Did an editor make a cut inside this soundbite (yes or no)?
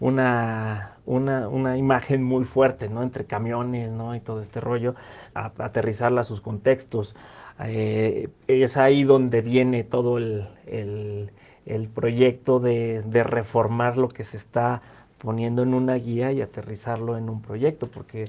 yes